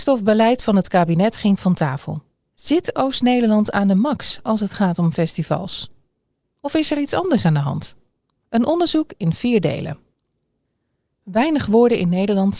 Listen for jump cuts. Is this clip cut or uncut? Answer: cut